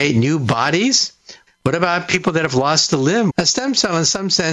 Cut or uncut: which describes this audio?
cut